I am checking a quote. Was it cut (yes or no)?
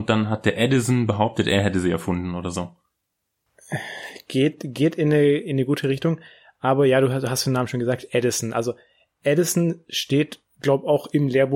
no